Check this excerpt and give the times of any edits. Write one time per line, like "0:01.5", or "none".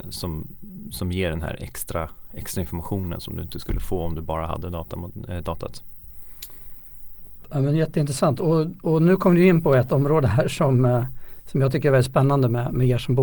none